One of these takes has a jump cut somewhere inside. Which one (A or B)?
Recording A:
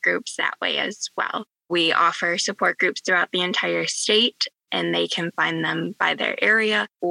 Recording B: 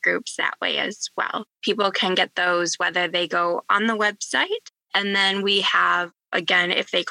B